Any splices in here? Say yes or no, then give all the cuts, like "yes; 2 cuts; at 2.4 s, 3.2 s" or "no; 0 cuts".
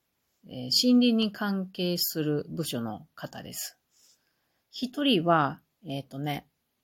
yes; 1 cut; at 4.6 s